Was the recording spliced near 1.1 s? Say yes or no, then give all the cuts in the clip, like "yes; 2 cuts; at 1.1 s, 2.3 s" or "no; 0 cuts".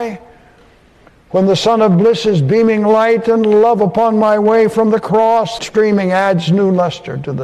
no; 1 cut; at 5.6 s